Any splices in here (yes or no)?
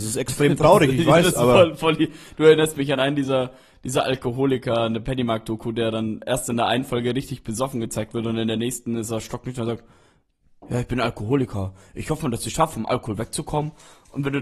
no